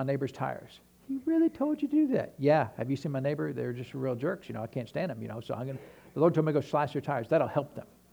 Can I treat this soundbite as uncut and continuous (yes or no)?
yes